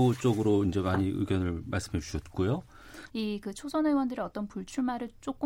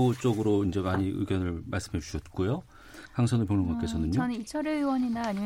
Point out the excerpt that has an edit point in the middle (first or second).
first